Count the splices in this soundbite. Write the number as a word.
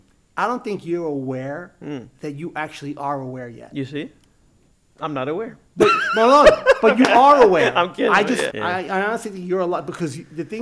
one